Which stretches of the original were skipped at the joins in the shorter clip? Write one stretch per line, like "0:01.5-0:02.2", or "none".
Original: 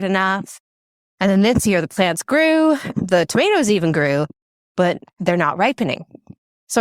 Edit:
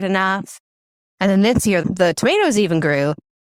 0:01.8-0:02.9